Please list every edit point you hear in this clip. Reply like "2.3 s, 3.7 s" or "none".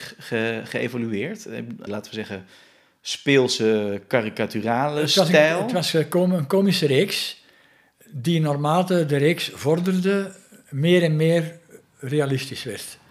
1.9 s